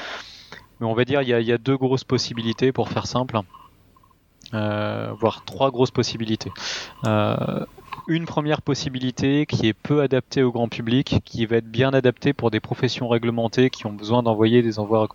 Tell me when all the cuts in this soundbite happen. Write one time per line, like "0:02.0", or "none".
none